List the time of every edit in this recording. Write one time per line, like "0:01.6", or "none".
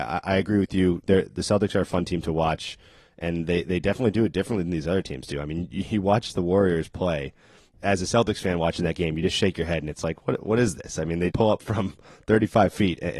0:07.7
0:11.3